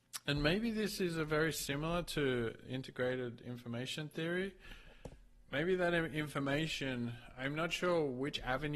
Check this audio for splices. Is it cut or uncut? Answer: uncut